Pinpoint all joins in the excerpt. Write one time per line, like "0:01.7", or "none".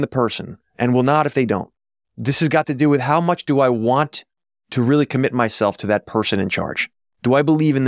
0:02.0